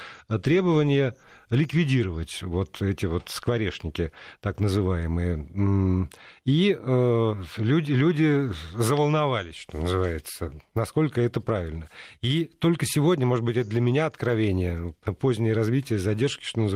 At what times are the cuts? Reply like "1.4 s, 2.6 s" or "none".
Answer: none